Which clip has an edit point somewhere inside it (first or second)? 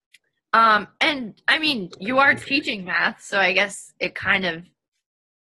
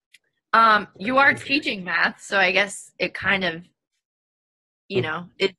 second